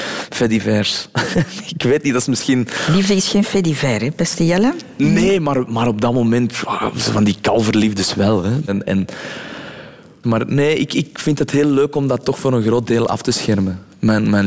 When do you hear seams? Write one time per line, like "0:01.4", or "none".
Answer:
0:08.7
0:10.2